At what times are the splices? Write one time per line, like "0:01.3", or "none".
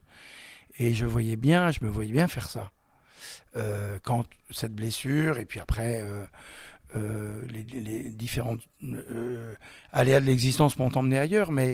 none